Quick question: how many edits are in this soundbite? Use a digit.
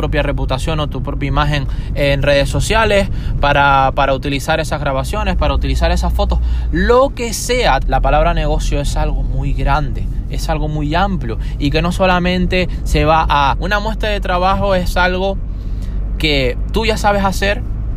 2